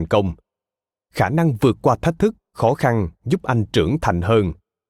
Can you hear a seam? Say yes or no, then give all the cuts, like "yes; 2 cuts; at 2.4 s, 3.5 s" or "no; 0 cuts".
no; 0 cuts